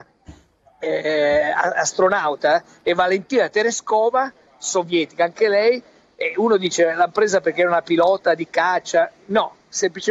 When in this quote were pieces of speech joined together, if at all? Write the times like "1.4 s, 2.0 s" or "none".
none